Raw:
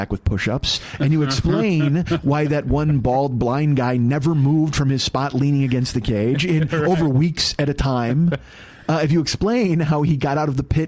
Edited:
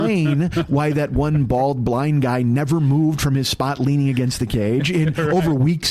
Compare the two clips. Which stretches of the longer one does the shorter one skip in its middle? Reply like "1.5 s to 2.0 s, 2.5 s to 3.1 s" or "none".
none